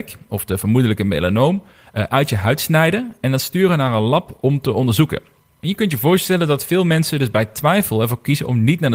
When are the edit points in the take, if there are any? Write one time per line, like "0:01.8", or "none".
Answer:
none